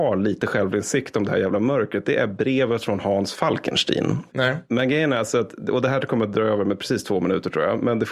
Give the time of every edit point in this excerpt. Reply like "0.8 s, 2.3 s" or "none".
4.3 s